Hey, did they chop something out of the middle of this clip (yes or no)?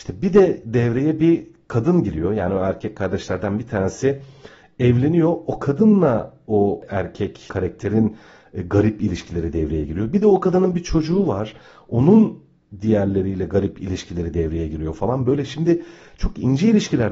no